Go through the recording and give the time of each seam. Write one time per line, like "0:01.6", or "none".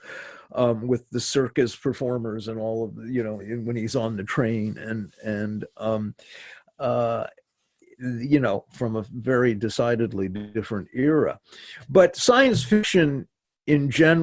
0:03.4